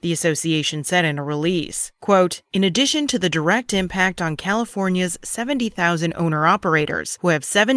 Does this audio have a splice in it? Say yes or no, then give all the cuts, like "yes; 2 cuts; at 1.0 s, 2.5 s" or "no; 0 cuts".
no; 0 cuts